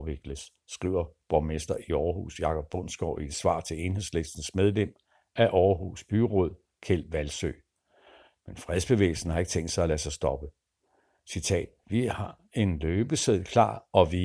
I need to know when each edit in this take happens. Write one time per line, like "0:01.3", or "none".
none